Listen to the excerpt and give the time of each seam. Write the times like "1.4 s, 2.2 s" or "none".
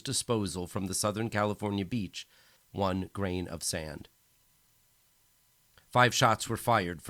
2.6 s